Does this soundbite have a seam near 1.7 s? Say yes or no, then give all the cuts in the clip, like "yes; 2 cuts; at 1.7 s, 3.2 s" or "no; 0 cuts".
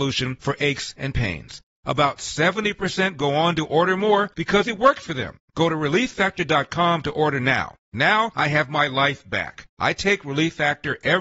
yes; 2 cuts; at 1.7 s, 7.9 s